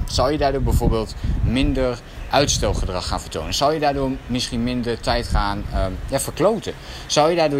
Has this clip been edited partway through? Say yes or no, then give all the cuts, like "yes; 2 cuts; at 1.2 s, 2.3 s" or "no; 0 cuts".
no; 0 cuts